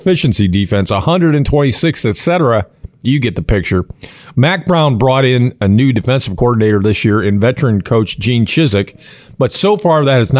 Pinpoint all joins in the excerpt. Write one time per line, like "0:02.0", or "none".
none